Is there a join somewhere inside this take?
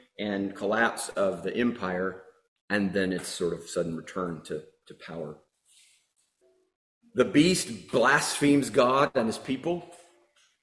no; 0 cuts

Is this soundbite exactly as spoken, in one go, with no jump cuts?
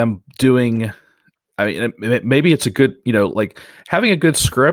yes; 0 cuts

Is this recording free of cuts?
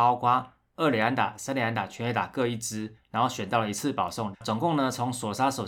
no; 1 cut; at 4.3 s

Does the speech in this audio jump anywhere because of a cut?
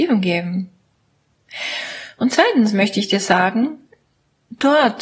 no; 0 cuts

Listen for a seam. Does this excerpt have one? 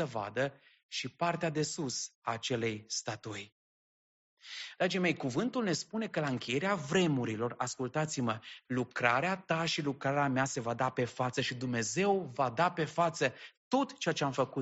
yes; 2 cuts; at 4.8 s, 8.6 s

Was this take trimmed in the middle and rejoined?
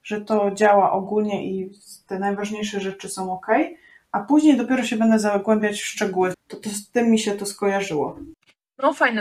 yes; 1 cut; at 6.3 s

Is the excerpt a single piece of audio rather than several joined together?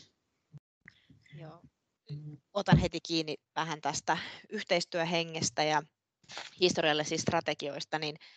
yes; 0 cuts

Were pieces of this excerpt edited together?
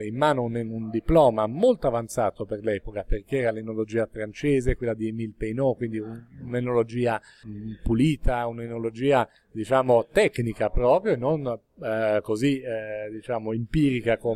no; 0 cuts

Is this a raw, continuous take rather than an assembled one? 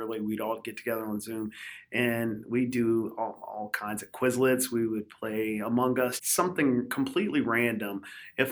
no; 1 cut; at 6.2 s

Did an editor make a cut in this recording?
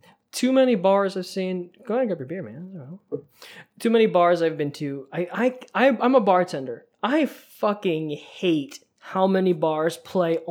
no; 0 cuts

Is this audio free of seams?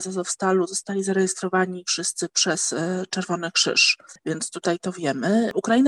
yes; 0 cuts

